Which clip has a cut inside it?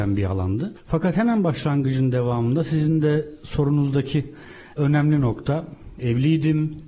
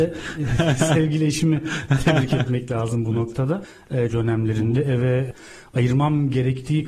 second; 1 cut; at 4.1 s

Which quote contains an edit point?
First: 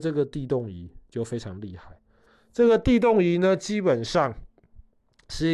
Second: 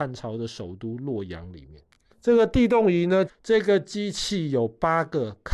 second; 2 cuts; at 2.1 s, 3.3 s

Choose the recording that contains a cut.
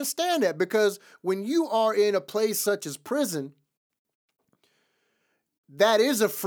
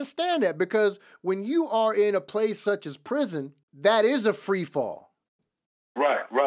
second; 1 cut; at 3.6 s

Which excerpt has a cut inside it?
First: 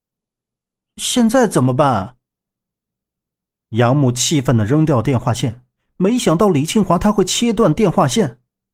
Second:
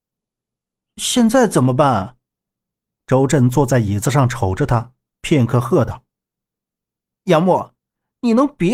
second; 1 cut; at 3.0 s

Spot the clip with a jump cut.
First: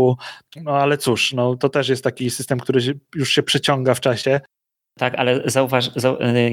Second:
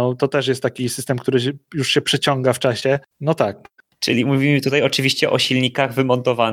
second; 1 cut; at 3.1 s

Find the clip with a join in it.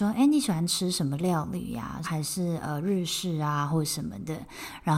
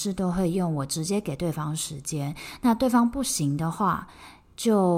first; 1 cut; at 2.0 s

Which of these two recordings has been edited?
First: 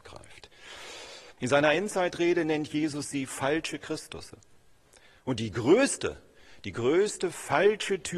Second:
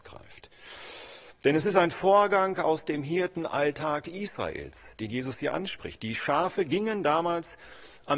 first; 1 cut; at 1.4 s

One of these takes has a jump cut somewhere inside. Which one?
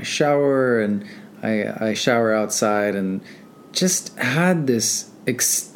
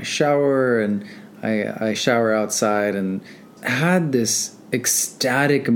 second; 1 cut; at 3.6 s

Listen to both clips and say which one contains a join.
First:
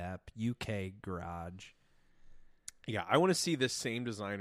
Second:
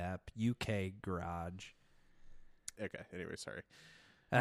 second; 1 cut; at 2.8 s

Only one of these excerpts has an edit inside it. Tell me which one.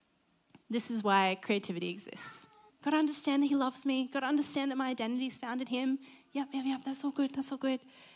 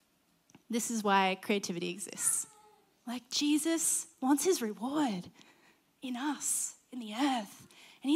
first; 1 cut; at 2.7 s

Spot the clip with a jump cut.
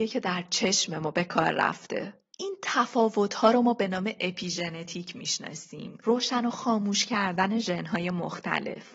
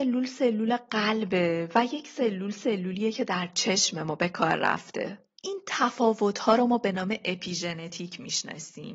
first; 1 cut; at 6.0 s

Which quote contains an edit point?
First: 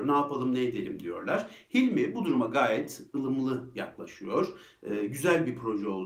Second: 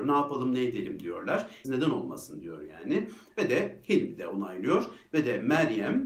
second; 1 cut; at 1.6 s

